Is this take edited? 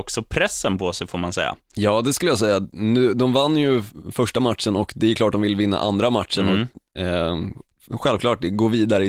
no; 0 cuts

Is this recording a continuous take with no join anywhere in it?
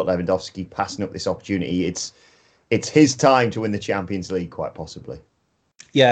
yes; 0 cuts

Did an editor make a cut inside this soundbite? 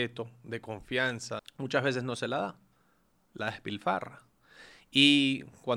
yes; 1 cut; at 1.4 s

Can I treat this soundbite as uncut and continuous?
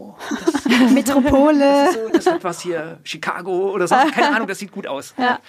yes; 0 cuts

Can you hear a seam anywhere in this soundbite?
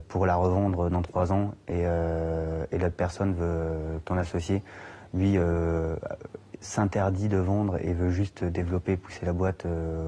no; 0 cuts

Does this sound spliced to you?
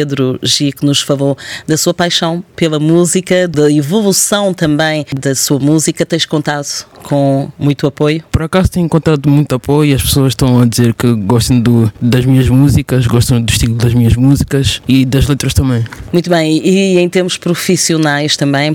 no; 0 cuts

